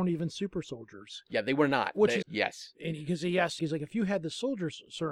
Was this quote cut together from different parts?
yes; 2 cuts; at 2.2 s, 3.6 s

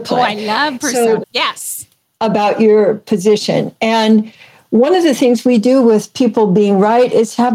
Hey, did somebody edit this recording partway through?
yes; 1 cut; at 1.2 s

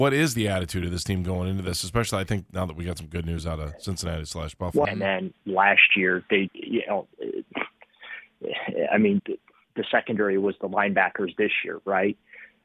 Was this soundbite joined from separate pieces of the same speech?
yes; 3 cuts; at 4.8 s, 6.5 s, 9.2 s

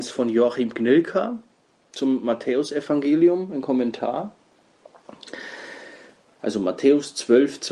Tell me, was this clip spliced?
yes; 1 cut; at 6.4 s

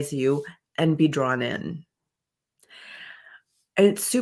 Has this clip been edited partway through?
no; 0 cuts

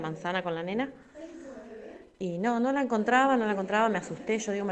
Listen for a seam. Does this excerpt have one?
no; 0 cuts

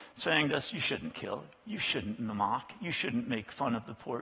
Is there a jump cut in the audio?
no; 0 cuts

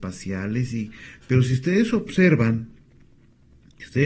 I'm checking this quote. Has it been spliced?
no; 0 cuts

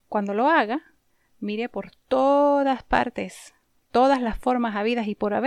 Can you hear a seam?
no; 0 cuts

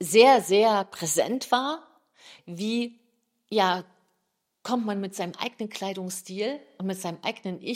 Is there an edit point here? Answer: yes; 1 cut; at 2.4 s

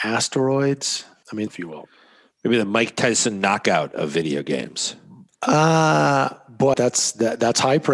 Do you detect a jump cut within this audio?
yes; 3 cuts; at 1.5 s, 5.3 s, 6.7 s

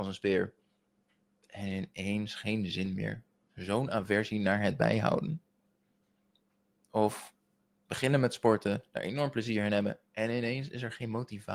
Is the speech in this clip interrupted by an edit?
no; 0 cuts

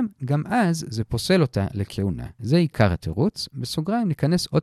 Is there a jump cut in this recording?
yes; 1 cut; at 2.4 s

